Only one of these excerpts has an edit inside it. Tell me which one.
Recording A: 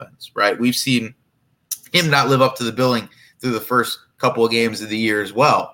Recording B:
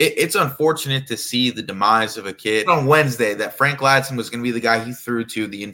B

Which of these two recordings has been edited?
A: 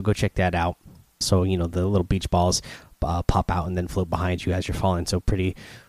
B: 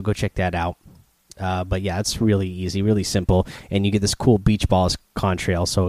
A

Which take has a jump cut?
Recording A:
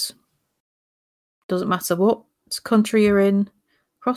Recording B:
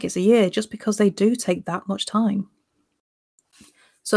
A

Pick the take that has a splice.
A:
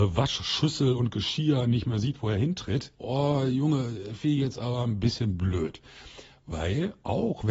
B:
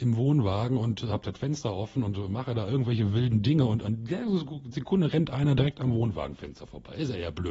A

